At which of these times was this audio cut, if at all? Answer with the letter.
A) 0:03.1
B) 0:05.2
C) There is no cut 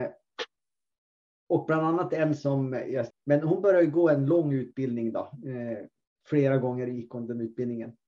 A